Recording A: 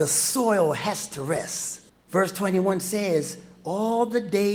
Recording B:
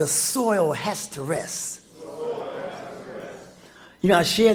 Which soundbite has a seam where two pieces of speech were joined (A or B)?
A